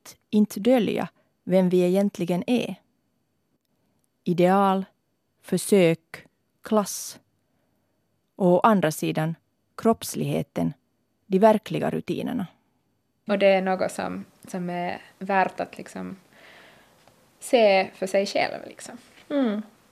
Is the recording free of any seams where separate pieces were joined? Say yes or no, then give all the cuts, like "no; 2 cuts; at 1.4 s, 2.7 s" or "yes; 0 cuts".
no; 1 cut; at 13.3 s